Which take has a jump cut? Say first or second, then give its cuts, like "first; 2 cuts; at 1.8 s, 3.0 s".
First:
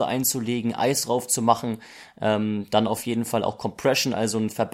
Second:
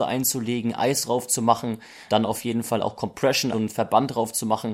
second; 2 cuts; at 2.1 s, 3.5 s